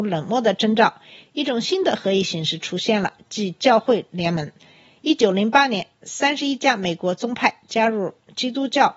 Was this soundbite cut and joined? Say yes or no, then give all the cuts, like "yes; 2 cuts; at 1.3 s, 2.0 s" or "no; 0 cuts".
no; 0 cuts